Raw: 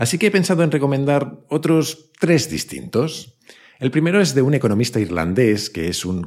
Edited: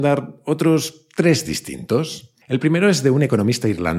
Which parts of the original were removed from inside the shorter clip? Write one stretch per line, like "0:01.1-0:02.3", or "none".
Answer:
0:03.5-0:03.7